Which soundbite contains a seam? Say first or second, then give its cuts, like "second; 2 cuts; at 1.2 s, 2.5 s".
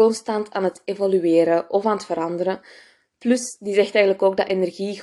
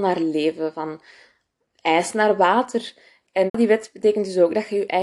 second; 1 cut; at 3.5 s